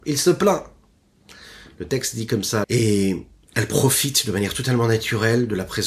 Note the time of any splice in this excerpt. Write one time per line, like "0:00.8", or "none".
0:02.6